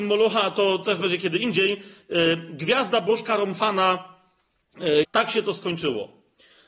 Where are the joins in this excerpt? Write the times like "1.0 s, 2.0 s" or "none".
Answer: 5.0 s